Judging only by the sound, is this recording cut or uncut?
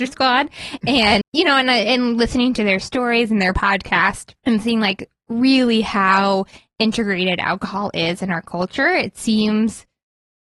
cut